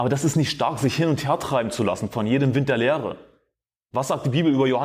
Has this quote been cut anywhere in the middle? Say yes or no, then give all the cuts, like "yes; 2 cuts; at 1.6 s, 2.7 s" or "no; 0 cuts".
no; 0 cuts